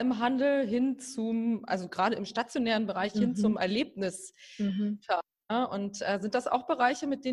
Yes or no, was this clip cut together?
no